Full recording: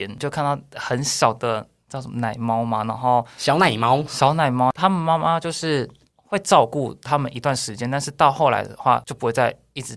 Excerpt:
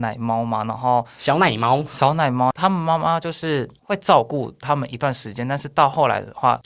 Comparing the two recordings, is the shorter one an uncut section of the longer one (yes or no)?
no